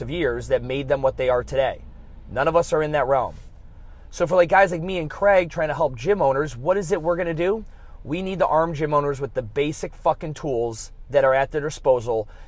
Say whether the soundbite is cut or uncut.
uncut